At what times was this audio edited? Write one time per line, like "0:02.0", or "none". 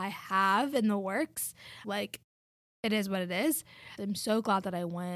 0:01.8
0:04.0